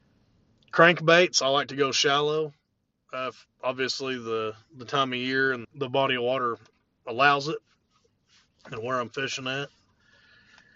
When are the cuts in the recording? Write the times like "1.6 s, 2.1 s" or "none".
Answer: 3.5 s, 5.6 s